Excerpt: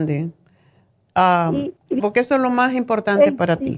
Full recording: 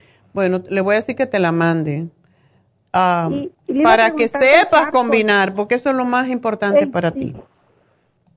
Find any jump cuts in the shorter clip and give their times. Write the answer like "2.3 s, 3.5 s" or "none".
2.0 s